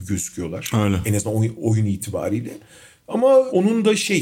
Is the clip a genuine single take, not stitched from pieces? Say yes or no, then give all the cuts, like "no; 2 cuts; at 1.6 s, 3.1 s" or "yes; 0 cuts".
yes; 0 cuts